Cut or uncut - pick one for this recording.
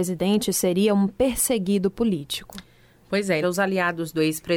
cut